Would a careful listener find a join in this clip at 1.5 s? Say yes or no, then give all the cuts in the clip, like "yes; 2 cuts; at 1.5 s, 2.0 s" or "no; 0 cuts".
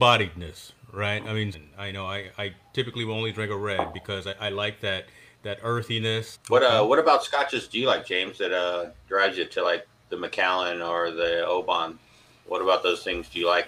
yes; 2 cuts; at 1.5 s, 6.3 s